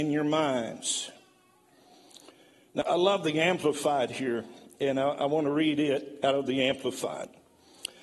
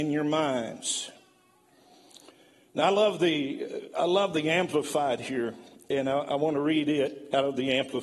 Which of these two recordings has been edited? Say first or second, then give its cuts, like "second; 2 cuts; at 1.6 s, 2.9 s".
first; 1 cut; at 2.8 s